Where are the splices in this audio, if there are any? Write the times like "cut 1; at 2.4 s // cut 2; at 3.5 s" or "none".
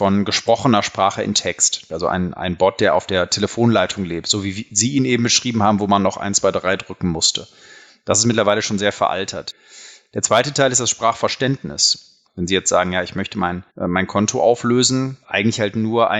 cut 1; at 12.2 s // cut 2; at 13.7 s // cut 3; at 15.2 s

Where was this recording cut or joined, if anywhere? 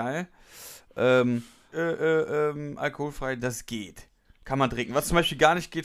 cut 1; at 1.7 s

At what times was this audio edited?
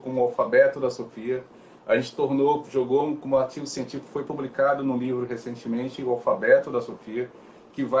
none

